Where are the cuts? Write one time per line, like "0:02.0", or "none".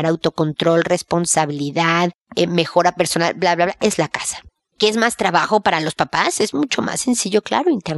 none